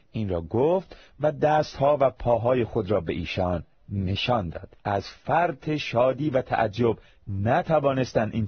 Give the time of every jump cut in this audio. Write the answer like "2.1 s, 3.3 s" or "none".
4.8 s

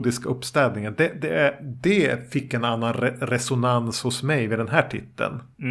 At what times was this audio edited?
none

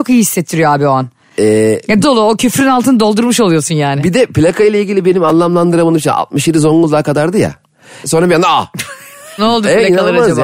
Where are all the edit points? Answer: 2.0 s, 8.0 s, 9.4 s

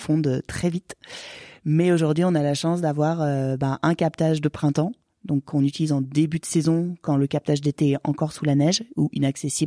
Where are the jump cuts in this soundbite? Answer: none

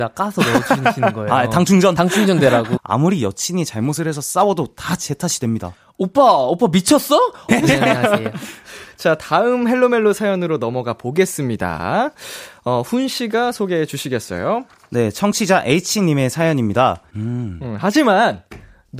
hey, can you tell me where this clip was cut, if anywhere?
2.8 s, 7.5 s, 17.1 s

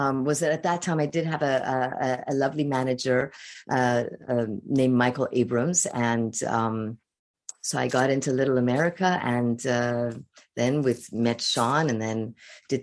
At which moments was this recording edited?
none

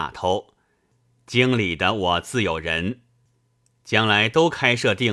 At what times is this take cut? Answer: none

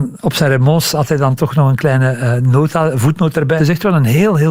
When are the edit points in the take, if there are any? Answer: 3.6 s

